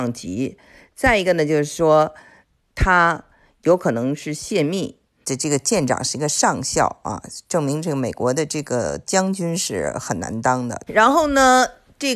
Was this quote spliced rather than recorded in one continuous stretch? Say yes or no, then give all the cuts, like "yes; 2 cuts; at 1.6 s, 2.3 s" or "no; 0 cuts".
yes; 2 cuts; at 5.2 s, 10.9 s